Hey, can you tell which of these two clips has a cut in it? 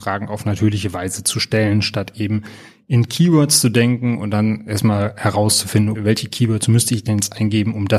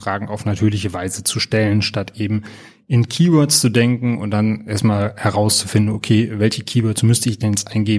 first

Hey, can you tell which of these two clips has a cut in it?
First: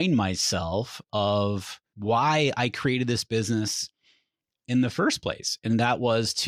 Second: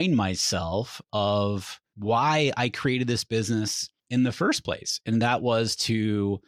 second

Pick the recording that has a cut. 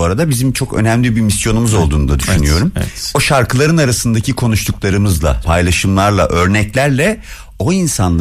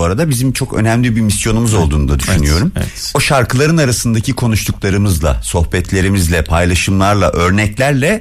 first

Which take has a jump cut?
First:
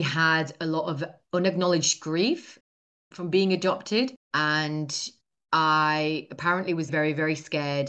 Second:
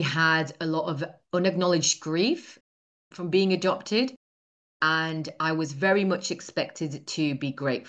first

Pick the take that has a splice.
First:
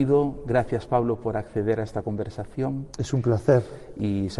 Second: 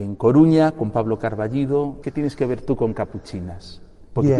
second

